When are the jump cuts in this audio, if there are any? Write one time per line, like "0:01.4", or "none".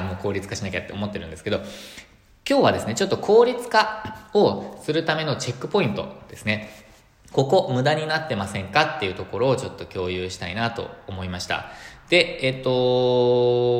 none